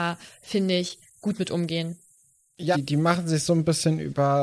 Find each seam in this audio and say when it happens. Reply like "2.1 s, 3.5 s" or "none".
2.7 s